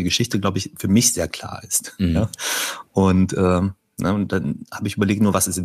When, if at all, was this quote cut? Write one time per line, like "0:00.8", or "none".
none